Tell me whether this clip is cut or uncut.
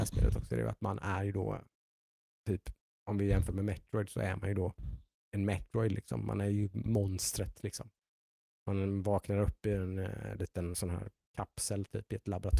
cut